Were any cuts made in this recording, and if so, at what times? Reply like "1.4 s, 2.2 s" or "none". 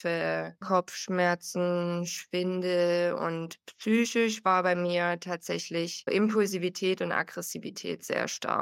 6.1 s